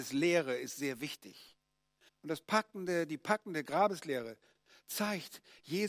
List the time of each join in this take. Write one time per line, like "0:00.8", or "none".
0:02.1